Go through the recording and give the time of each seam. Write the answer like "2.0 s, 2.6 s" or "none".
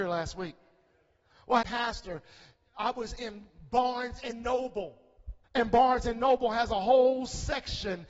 1.6 s, 5.4 s